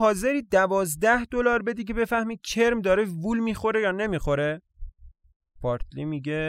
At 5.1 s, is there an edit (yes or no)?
no